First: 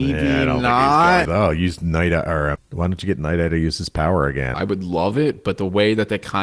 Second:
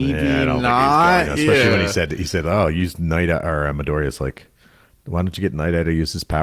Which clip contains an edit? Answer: first; 3 cuts; at 1.3 s, 2.6 s, 4.5 s

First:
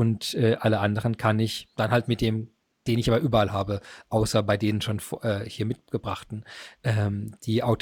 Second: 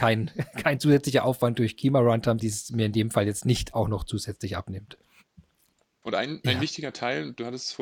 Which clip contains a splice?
second; 2 cuts; at 2.4 s, 6.0 s

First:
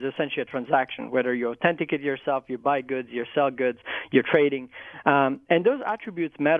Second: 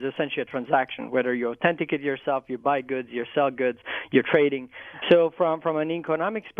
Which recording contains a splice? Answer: second; 1 cut; at 5.0 s

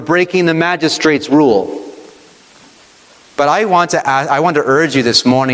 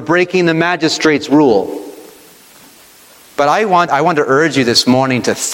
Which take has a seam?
second; 1 cut; at 3.9 s

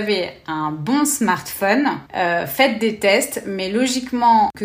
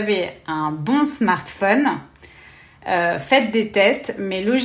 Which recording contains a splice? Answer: first; 1 cut; at 2.1 s

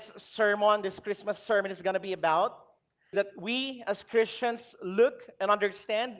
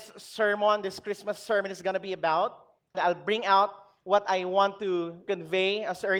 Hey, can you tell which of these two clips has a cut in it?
second; 1 cut; at 2.9 s

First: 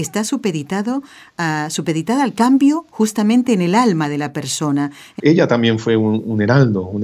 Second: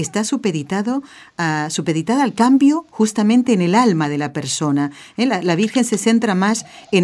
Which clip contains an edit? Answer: first; 1 cut; at 5.2 s

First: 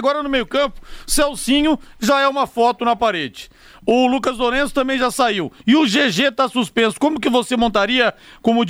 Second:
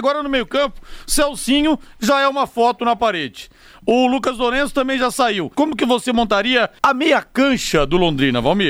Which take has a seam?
second; 2 cuts; at 5.5 s, 6.8 s

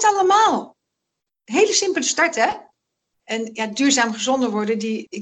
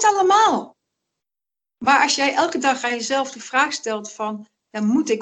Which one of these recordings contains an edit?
first; 2 cuts; at 1.3 s, 3.1 s

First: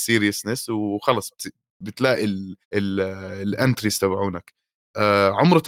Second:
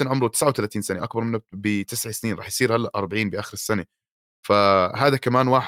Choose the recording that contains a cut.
first; 1 cut; at 2.6 s

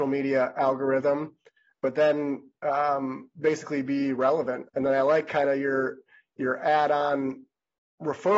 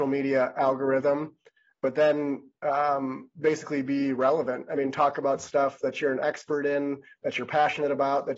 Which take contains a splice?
first; 1 cut; at 4.7 s

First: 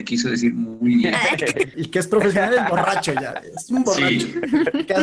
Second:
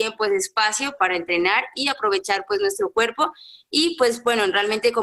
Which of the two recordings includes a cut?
first; 1 cut; at 1.7 s

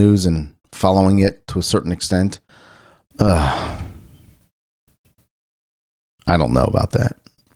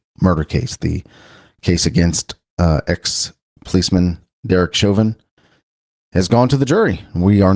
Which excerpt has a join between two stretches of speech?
first; 1 cut; at 3.1 s

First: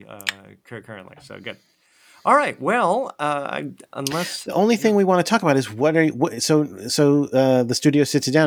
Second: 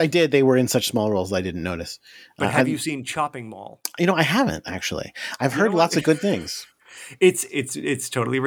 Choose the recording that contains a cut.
second; 1 cut; at 7.5 s

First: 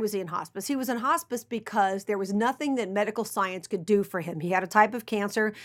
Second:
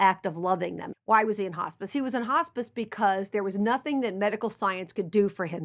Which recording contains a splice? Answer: second; 1 cut; at 0.9 s

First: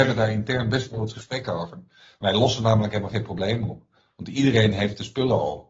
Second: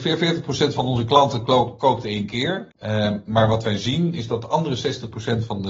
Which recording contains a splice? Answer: second; 1 cut; at 2.7 s

